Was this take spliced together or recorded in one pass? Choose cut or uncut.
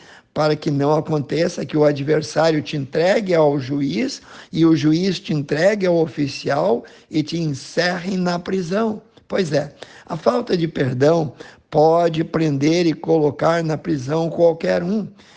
uncut